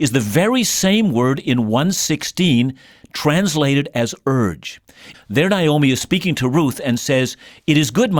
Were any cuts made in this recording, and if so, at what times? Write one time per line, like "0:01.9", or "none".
0:05.1